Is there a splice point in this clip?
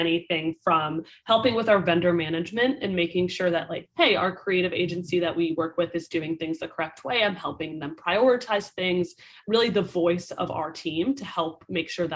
no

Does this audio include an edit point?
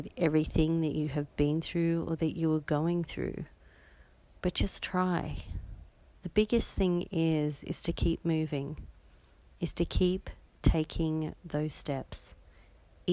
yes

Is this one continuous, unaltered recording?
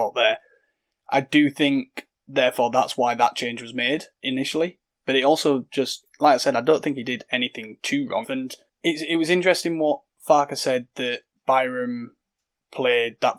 no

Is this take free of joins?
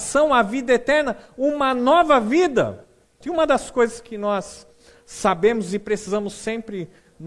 no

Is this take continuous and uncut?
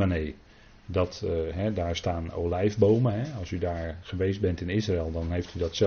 yes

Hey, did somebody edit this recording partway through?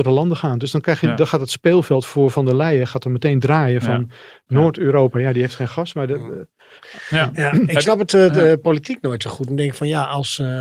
no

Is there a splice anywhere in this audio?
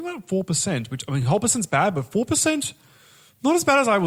no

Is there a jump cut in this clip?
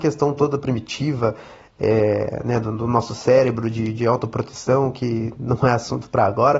no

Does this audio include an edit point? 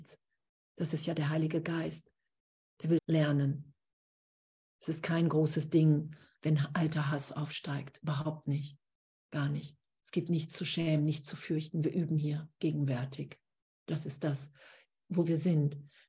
yes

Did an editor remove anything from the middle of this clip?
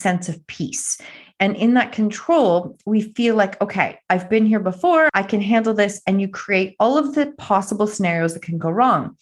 yes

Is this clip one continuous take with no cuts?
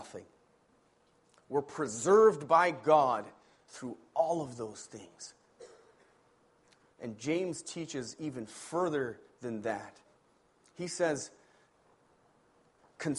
yes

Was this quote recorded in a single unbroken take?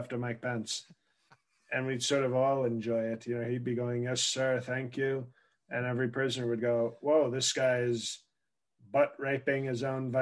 yes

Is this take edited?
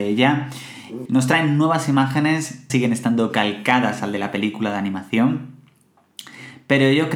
yes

